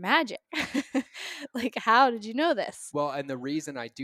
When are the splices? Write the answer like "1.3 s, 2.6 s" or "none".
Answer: none